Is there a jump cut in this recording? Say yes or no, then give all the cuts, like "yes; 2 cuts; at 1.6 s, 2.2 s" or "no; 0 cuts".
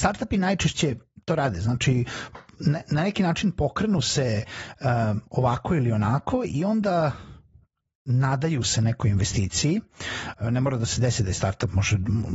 no; 0 cuts